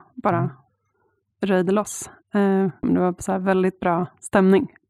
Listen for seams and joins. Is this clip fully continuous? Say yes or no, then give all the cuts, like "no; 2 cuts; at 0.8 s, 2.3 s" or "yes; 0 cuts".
no; 1 cut; at 2.8 s